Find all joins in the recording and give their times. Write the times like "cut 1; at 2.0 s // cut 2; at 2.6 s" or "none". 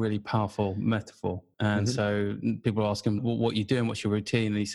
cut 1; at 1.5 s // cut 2; at 3.2 s